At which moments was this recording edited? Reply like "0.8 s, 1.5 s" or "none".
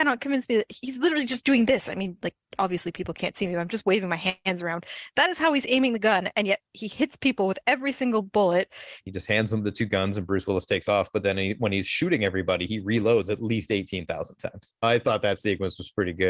9.0 s, 14.8 s